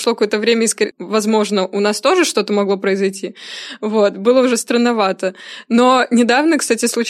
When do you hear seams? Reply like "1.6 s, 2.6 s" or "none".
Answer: 0.9 s